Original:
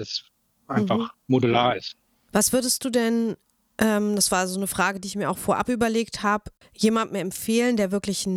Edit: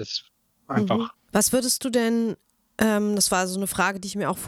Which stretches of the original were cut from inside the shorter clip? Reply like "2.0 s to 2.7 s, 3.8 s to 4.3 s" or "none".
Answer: 1.2 s to 2.2 s